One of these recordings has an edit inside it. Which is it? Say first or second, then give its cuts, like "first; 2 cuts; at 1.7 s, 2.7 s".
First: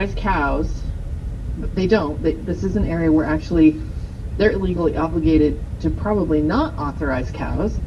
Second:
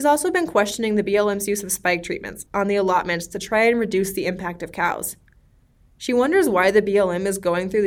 second; 1 cut; at 2.5 s